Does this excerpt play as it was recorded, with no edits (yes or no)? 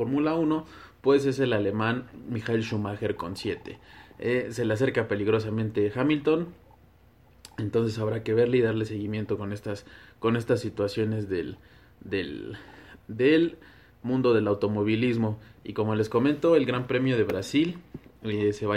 yes